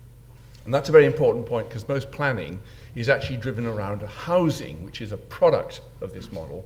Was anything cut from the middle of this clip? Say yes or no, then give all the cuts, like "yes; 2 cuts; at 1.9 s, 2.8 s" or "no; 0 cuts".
no; 0 cuts